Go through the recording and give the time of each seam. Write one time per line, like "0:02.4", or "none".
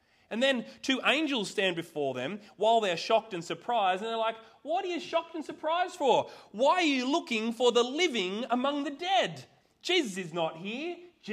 none